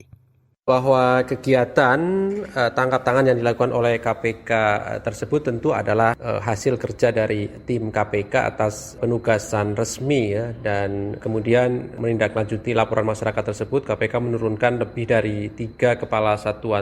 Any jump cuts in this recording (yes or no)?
yes